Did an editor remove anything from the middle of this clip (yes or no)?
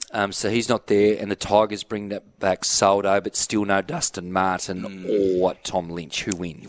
no